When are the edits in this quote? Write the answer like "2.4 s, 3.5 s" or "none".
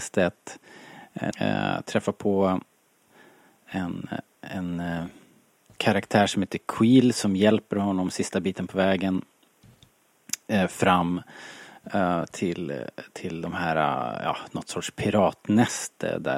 1.3 s